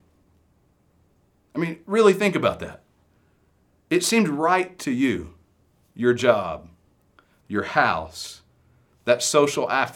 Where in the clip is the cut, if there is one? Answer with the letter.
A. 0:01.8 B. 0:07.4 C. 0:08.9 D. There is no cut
B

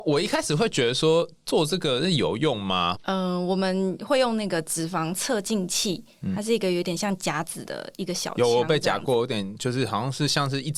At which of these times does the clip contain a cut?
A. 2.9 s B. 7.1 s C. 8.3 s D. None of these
A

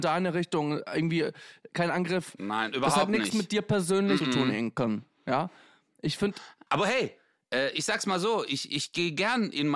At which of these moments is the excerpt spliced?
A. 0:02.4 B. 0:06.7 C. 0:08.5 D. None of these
B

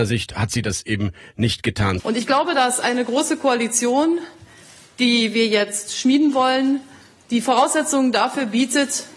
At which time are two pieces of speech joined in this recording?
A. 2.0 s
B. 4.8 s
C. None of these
A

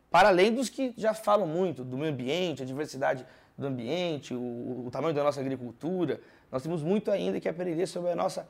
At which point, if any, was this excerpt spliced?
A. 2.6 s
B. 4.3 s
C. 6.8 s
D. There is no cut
D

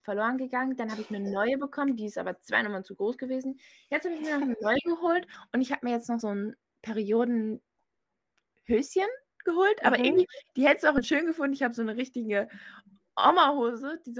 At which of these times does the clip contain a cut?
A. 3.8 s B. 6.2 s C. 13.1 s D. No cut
B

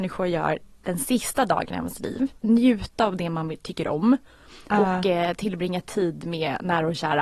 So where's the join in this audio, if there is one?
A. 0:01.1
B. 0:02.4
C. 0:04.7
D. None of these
B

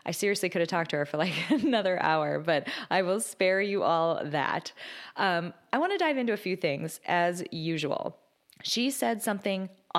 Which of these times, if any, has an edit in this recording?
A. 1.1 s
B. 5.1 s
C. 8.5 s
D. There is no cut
D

